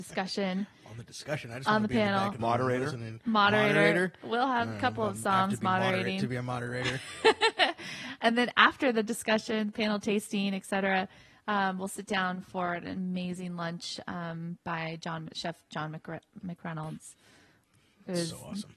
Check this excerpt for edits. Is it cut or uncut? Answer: uncut